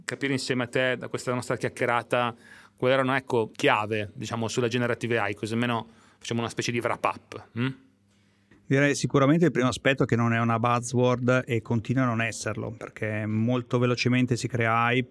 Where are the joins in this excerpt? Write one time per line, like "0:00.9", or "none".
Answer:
0:03.5